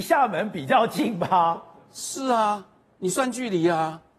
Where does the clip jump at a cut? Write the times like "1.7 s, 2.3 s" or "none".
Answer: none